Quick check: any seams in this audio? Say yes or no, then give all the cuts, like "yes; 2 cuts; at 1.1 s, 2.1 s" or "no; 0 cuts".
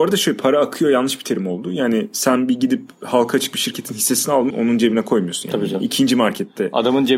yes; 1 cut; at 4.5 s